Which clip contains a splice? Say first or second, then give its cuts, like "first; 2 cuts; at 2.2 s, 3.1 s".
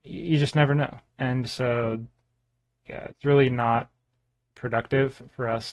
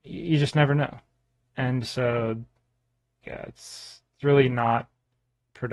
first; 2 cuts; at 1.1 s, 3.1 s